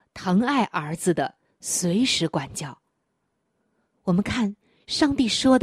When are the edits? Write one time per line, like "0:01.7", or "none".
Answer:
none

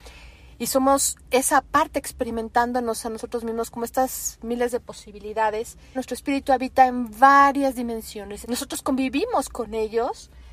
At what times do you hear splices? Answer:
0:05.9
0:08.4

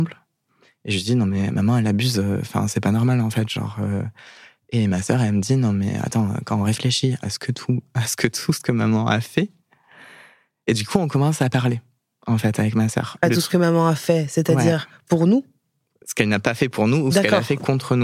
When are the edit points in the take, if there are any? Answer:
none

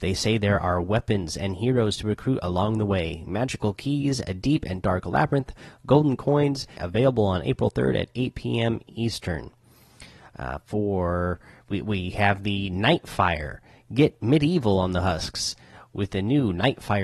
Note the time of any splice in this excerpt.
0:06.8

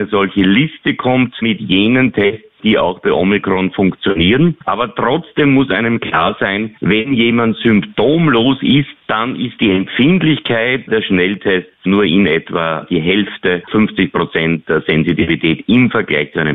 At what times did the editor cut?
0:13.7

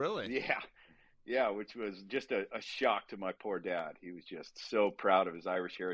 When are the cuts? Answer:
none

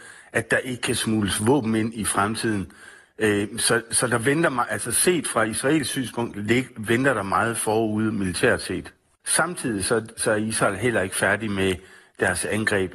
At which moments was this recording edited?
0:09.2

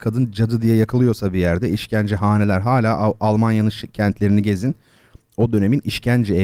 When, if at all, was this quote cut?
none

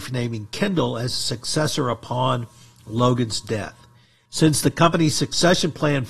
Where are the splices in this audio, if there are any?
0:04.3

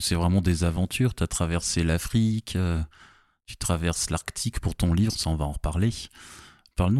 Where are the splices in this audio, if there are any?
none

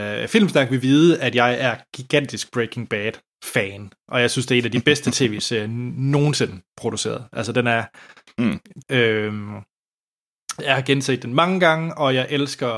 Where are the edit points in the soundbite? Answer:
0:08.8

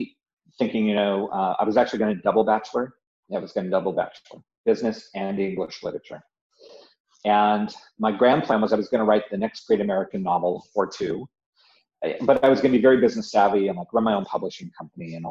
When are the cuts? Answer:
none

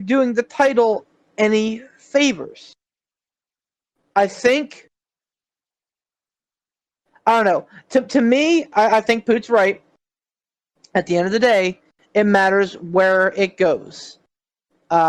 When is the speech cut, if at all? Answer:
0:08.7

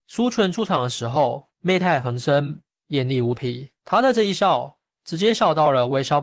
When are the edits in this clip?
0:01.5
0:03.8

